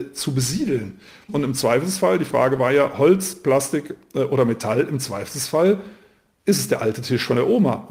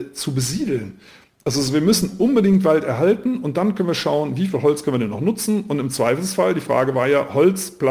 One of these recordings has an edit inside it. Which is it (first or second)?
first